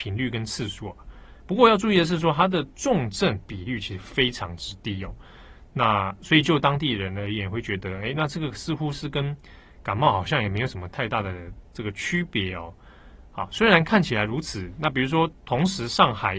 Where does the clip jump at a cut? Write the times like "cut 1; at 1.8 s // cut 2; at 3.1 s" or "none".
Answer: cut 1; at 1.4 s